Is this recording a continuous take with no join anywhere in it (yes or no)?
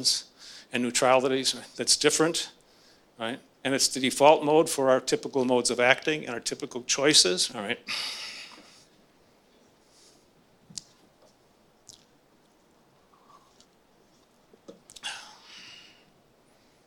no